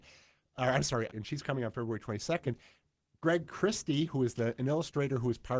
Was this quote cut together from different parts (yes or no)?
yes